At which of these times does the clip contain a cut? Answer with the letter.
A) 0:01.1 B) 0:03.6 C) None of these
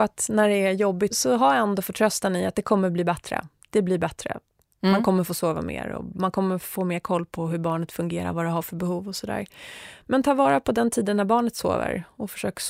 A